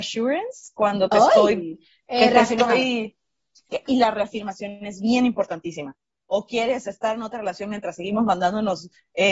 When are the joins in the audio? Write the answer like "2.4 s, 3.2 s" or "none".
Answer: 3.9 s, 6.2 s